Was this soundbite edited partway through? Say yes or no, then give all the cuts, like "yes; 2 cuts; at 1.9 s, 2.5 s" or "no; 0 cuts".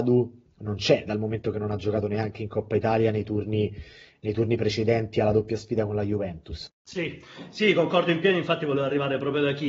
yes; 1 cut; at 6.7 s